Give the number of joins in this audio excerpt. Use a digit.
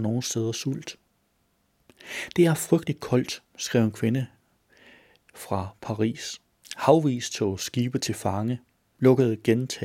1